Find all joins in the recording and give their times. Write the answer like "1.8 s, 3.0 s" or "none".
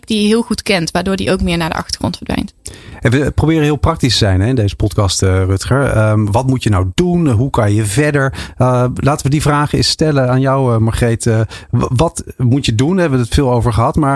none